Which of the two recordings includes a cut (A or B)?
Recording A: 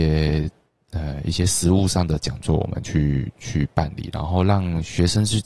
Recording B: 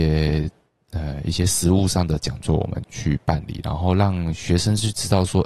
B